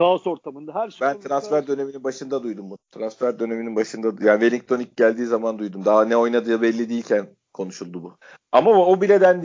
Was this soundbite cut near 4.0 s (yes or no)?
no